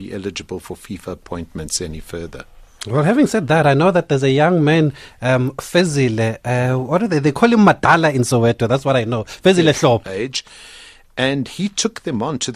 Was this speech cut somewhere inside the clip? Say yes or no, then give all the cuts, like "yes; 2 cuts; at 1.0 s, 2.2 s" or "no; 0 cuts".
yes; 1 cut; at 10.0 s